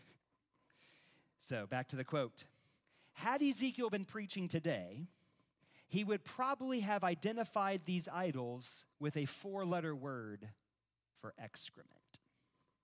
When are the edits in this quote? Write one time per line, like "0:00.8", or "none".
0:08.9